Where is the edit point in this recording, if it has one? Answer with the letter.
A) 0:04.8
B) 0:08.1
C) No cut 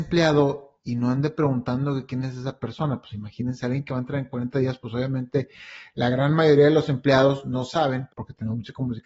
B